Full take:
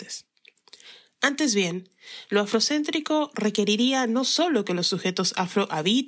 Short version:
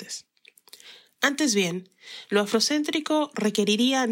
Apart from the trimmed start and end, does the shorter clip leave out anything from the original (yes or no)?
no